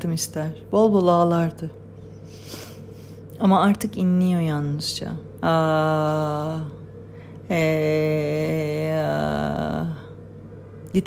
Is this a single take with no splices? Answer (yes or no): yes